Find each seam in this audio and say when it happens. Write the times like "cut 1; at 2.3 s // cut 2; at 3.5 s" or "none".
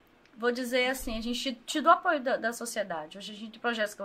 none